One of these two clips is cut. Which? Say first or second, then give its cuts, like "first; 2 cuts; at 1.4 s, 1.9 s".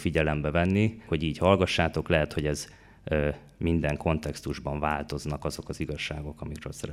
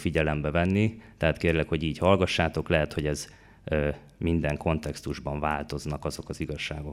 first; 1 cut; at 1.1 s